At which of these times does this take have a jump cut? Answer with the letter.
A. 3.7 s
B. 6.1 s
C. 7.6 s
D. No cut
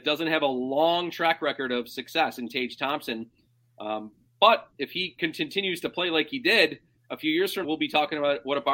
C